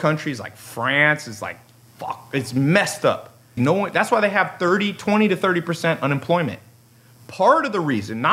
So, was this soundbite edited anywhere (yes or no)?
yes